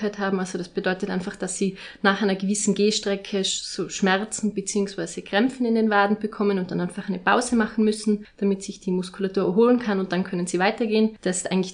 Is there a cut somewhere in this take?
no; 0 cuts

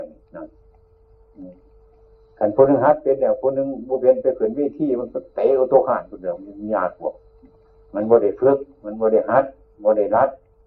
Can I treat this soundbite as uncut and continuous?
yes; 0 cuts

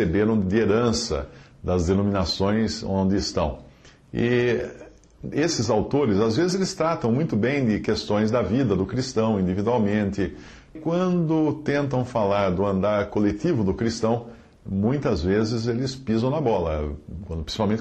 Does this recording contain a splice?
yes; 1 cut; at 10.8 s

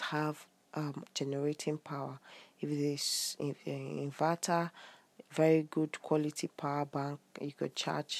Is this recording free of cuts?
no; 1 cut; at 1.0 s

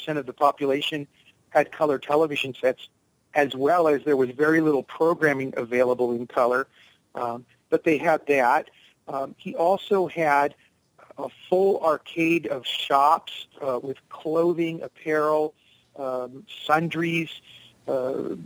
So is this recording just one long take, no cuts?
yes; 0 cuts

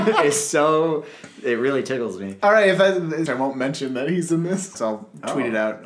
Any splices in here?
yes; 2 cuts; at 3.3 s, 4.7 s

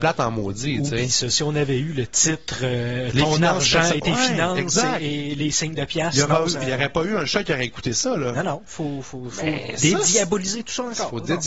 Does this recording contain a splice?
no; 0 cuts

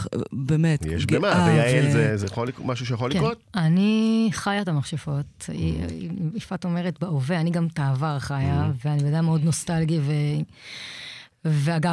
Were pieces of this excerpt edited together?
yes; 1 cut; at 2.2 s

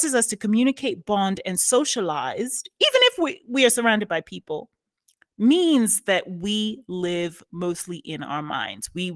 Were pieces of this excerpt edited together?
no; 0 cuts

